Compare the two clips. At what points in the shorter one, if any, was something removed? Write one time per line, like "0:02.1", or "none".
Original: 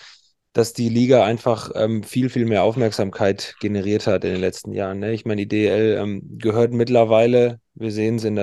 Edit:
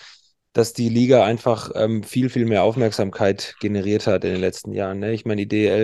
none